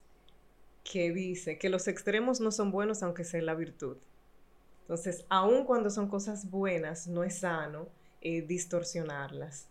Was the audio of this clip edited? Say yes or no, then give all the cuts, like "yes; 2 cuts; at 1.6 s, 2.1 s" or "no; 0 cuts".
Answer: no; 0 cuts